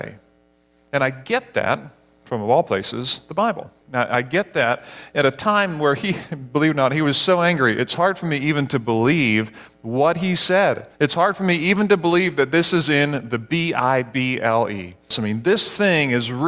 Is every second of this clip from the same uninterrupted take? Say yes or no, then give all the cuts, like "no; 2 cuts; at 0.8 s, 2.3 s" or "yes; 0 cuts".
no; 3 cuts; at 3.8 s, 10.9 s, 15.1 s